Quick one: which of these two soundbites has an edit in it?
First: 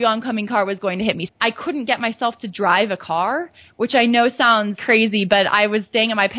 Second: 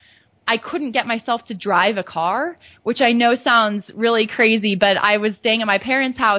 first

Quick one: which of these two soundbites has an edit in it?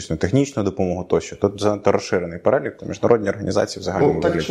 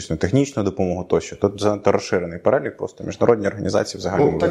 first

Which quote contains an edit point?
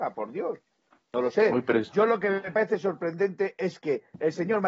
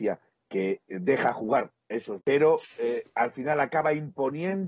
second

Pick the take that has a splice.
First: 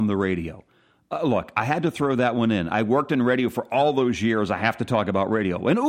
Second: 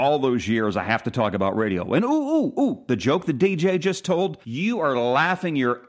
second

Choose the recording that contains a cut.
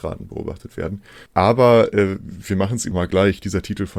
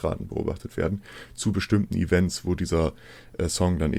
first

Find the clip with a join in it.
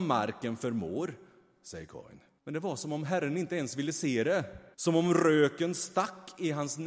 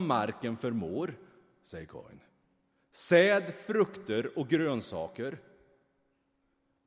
first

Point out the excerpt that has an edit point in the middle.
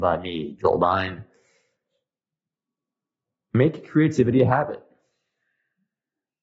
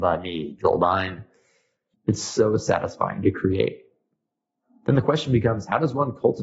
second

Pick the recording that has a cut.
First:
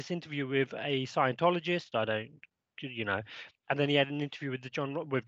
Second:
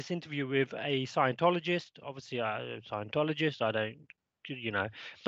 first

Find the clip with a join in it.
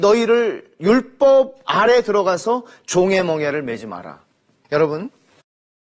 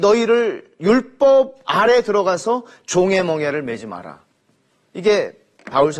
first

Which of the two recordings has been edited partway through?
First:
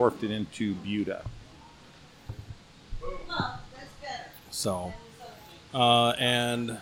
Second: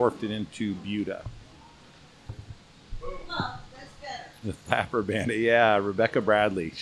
second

